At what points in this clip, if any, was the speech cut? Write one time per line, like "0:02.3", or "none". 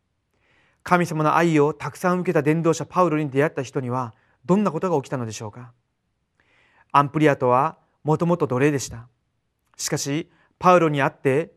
none

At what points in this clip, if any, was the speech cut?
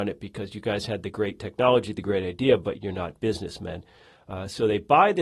0:02.7

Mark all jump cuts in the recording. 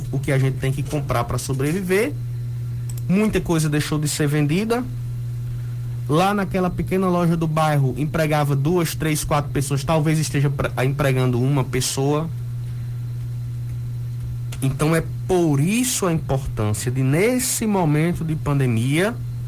0:14.5

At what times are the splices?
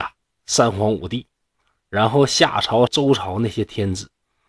0:02.9

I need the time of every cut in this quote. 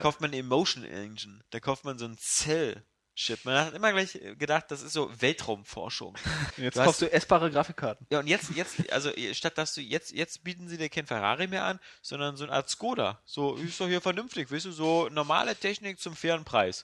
0:06.5

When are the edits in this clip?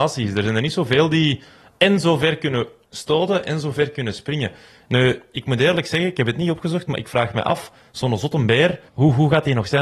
0:08.9

